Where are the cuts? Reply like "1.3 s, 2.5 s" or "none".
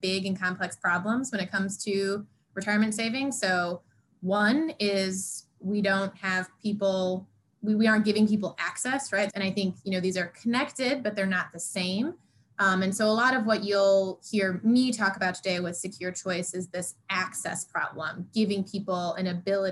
9.3 s

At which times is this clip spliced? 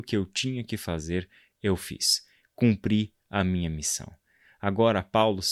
none

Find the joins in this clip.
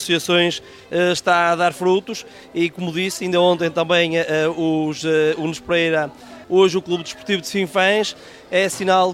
6.4 s

